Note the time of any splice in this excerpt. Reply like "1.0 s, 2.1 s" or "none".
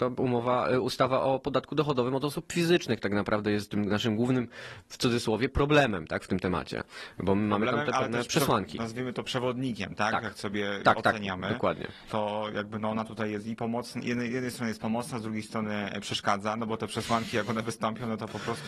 10.8 s